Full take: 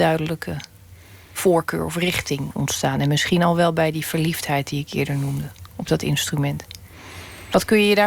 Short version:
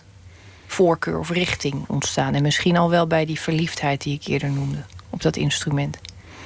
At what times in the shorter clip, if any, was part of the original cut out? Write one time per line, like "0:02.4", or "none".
none